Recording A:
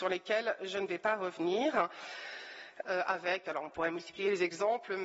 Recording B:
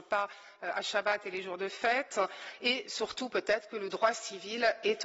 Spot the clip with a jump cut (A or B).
A